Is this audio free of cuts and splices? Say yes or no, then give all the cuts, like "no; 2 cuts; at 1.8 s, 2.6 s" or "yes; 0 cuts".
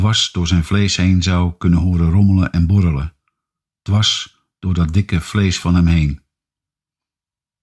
yes; 0 cuts